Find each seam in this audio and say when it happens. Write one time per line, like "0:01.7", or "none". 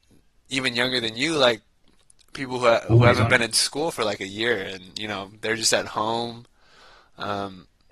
none